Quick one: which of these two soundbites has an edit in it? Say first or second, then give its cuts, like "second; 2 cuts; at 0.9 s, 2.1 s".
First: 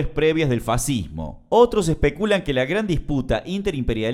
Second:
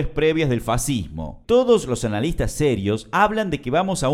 second; 1 cut; at 1.4 s